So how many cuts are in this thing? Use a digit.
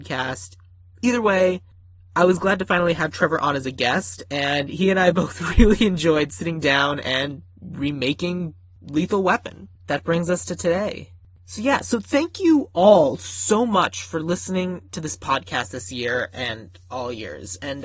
1